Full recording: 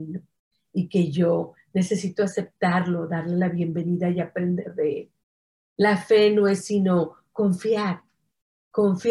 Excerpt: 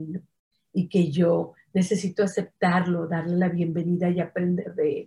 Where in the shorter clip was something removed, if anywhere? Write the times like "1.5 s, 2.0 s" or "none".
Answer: none